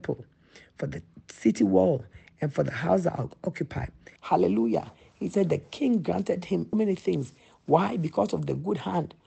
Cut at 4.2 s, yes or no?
yes